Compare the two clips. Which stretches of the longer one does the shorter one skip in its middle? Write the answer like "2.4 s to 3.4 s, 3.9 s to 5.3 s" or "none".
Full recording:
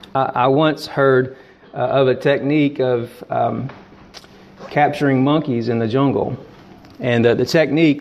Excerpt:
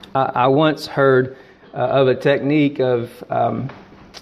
none